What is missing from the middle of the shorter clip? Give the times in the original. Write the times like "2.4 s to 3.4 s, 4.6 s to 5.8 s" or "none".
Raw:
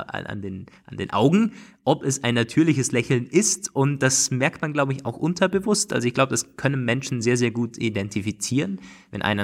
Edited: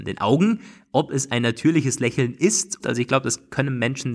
3.7 s to 5.9 s